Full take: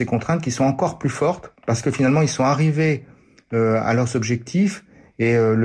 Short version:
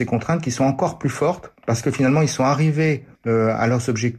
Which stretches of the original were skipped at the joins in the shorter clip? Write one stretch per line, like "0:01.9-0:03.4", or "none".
0:03.1-0:03.4